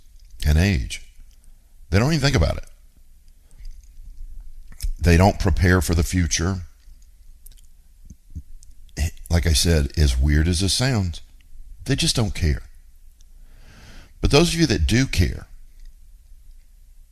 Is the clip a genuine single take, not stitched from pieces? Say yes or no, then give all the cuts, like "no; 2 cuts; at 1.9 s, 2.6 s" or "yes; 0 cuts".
yes; 0 cuts